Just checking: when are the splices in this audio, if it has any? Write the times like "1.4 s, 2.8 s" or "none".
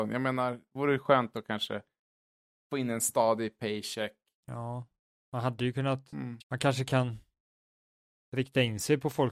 4.4 s, 6.4 s